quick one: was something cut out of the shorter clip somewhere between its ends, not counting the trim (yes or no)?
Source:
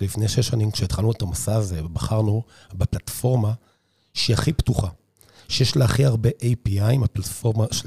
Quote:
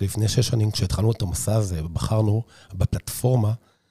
no